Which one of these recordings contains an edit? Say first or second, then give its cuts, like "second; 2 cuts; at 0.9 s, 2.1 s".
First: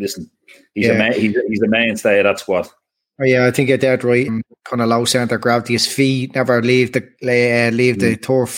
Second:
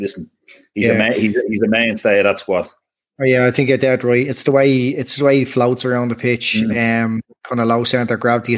first; 1 cut; at 4.3 s